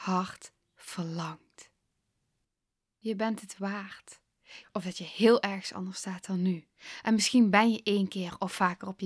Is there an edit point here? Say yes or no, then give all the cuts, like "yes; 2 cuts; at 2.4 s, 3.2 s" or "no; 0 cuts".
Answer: yes; 1 cut; at 4.6 s